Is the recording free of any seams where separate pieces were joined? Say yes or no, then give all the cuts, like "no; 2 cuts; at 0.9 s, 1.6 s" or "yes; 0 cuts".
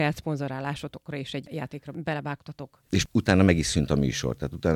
no; 1 cut; at 2.9 s